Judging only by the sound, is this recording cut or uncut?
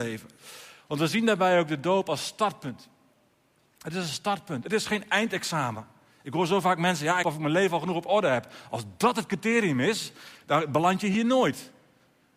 cut